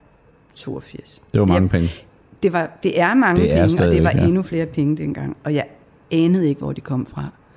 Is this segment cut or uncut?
uncut